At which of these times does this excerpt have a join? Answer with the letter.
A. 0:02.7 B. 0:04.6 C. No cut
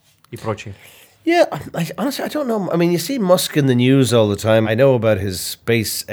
B